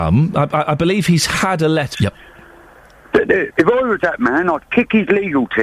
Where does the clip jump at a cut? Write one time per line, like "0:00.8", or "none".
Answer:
0:01.9
0:03.6